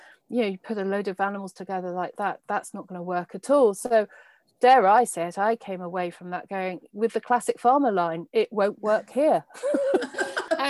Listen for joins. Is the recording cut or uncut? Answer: uncut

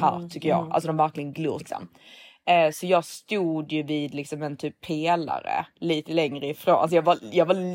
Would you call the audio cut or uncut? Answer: cut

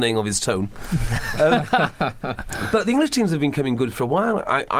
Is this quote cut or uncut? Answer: uncut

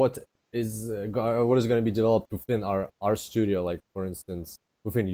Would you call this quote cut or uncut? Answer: uncut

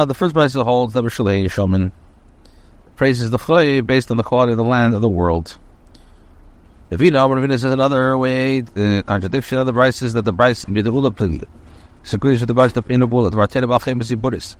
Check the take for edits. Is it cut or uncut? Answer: cut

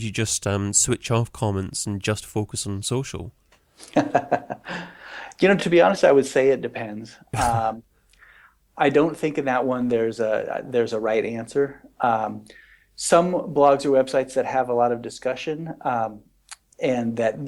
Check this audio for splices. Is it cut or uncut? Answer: uncut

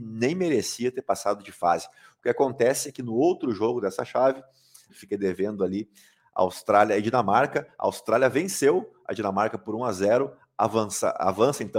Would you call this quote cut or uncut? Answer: cut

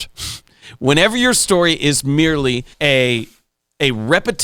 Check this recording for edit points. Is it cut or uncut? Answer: cut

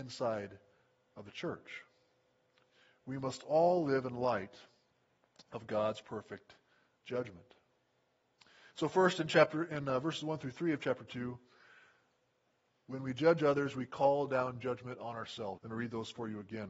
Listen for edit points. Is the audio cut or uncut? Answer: cut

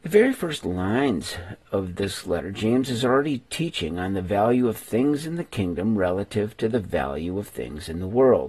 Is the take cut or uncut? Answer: uncut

